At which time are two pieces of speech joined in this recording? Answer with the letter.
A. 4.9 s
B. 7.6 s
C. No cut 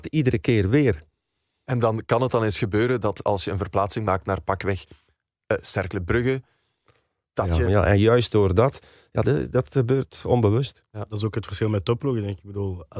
B